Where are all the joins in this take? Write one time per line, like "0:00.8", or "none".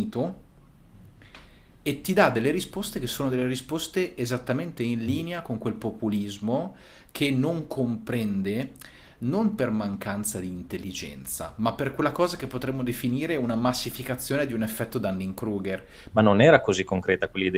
0:16.1